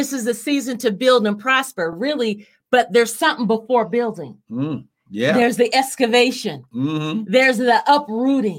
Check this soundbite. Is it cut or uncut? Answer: uncut